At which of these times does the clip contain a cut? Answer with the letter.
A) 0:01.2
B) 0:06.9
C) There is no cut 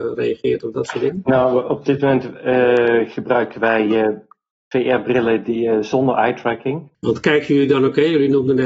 B